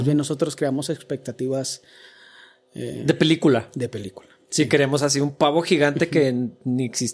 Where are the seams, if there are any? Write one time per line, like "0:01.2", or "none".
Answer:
none

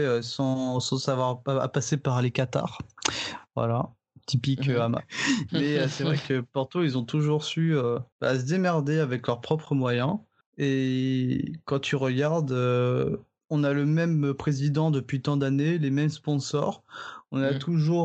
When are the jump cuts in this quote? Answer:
0:05.0

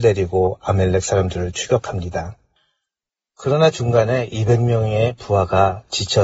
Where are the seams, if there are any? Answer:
none

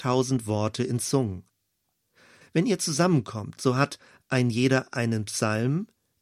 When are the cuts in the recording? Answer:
0:02.4

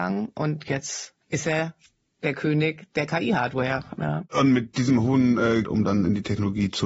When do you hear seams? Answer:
0:01.2
0:04.0
0:05.6

